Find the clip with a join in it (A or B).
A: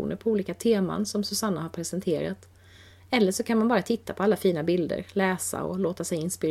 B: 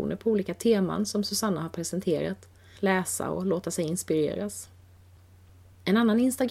B